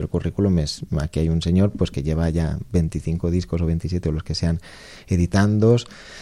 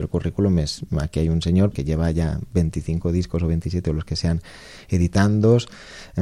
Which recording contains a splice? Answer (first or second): second